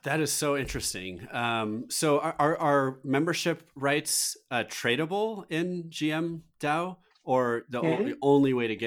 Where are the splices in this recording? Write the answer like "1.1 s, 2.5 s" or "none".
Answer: none